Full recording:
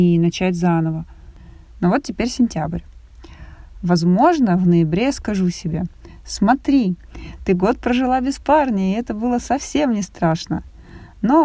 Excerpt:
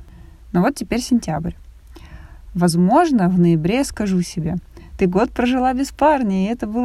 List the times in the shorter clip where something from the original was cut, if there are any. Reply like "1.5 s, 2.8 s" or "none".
4.9 s